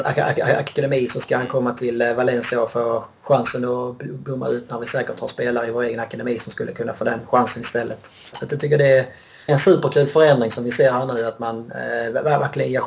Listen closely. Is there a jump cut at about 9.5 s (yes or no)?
yes